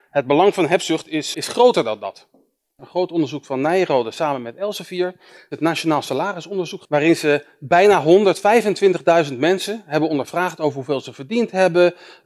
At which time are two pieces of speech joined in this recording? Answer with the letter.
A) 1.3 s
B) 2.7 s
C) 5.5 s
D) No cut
A